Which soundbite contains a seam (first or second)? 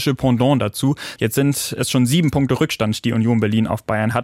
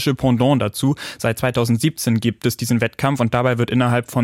first